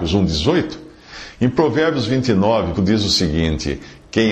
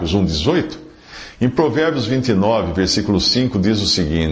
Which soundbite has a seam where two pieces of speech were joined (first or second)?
first